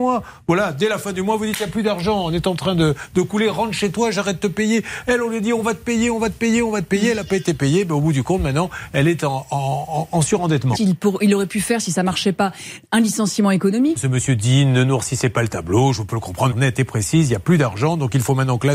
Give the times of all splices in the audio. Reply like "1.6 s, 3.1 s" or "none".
10.7 s, 14.0 s, 16.5 s